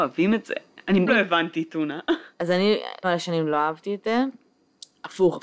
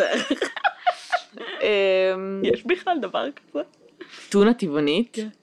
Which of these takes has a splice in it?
first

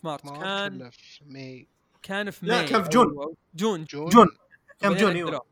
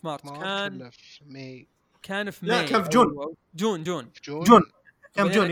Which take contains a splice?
first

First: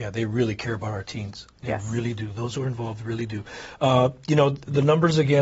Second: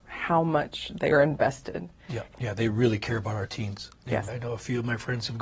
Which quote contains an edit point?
second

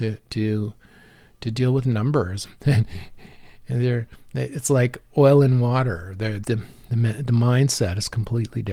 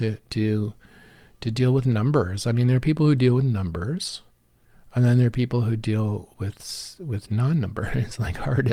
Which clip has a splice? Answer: first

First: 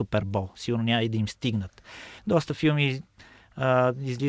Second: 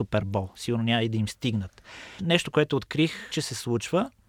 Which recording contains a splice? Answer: second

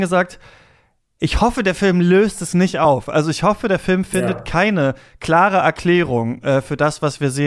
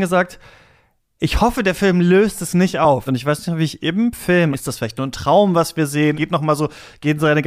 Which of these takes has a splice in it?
second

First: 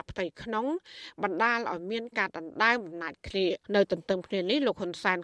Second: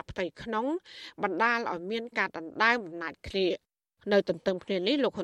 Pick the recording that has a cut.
first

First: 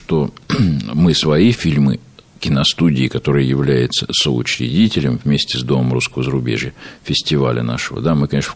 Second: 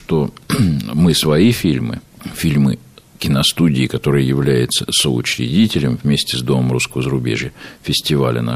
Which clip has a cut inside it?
first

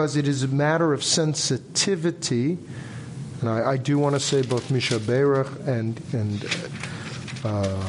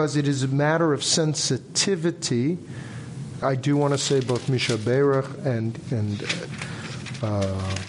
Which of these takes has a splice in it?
second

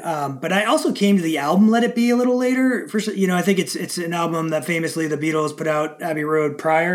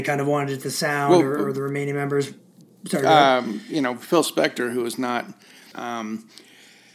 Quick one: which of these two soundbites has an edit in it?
second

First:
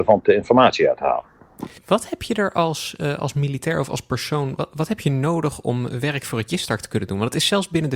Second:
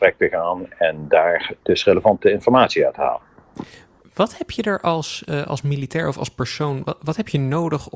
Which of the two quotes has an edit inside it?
first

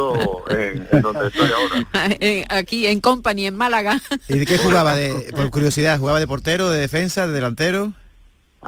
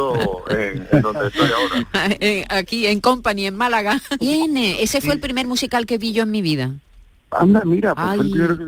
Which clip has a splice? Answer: second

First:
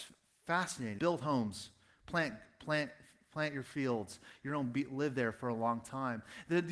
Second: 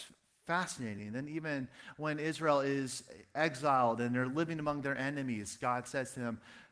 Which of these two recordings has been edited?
first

